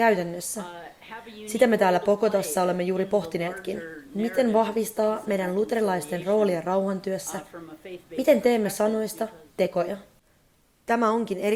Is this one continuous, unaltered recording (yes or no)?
yes